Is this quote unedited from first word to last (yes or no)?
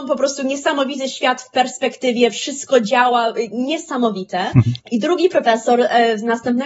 no